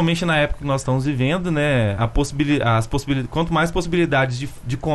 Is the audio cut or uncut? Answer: uncut